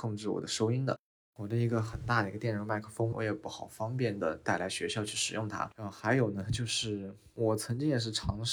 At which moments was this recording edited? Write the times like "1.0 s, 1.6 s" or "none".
3.1 s

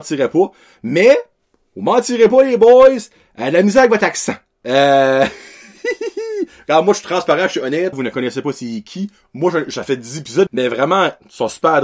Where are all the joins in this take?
7.9 s, 10.5 s

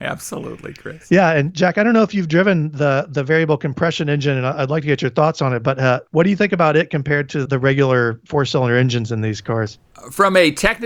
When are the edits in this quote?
6.1 s, 7.5 s

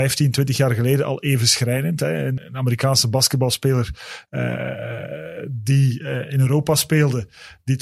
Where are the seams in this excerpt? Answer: 2.4 s

